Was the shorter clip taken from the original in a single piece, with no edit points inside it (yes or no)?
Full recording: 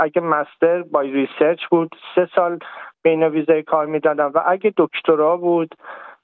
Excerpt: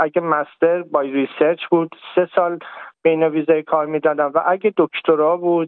yes